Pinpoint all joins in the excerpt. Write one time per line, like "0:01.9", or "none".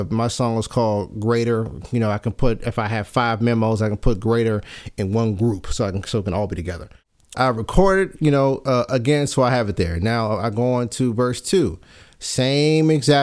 0:07.3